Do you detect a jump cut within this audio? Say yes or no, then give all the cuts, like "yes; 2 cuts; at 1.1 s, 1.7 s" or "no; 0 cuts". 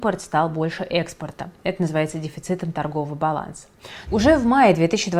yes; 1 cut; at 4.1 s